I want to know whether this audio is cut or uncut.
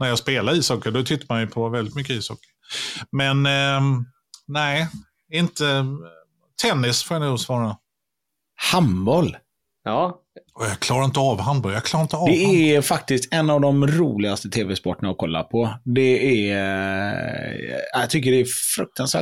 uncut